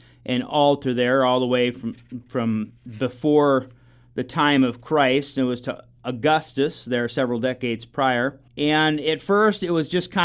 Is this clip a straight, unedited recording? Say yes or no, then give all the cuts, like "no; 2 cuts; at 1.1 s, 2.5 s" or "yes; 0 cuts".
no; 1 cut; at 8.5 s